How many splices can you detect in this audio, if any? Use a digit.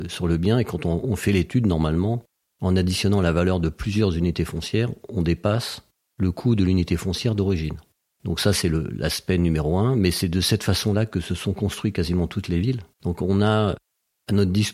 1